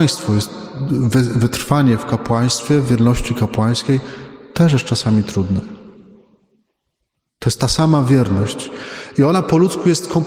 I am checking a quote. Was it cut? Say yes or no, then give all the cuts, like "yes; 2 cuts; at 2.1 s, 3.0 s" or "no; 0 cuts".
no; 0 cuts